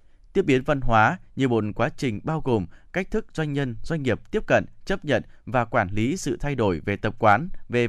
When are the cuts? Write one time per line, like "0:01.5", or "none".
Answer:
none